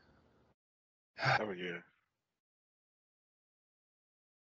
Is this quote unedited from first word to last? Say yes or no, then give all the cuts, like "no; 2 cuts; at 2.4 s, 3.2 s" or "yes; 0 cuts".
no; 1 cut; at 1.4 s